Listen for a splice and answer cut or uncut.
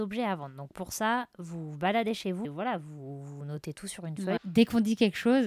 cut